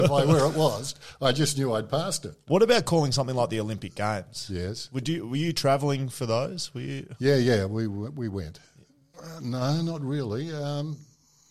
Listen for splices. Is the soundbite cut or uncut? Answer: cut